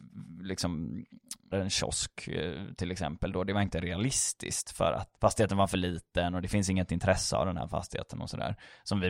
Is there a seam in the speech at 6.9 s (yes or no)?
no